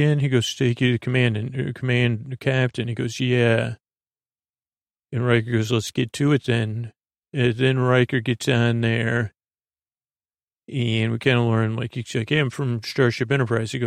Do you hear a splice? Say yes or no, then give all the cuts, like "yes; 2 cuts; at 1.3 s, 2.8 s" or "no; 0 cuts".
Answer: no; 0 cuts